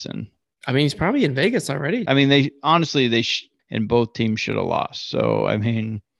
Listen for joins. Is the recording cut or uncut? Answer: cut